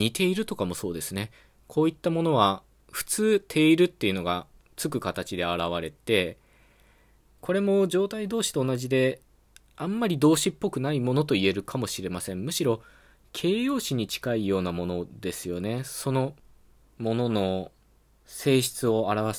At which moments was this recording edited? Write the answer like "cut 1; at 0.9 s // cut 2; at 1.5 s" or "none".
none